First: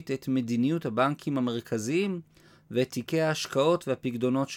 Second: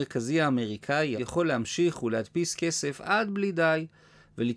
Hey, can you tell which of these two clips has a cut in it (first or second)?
second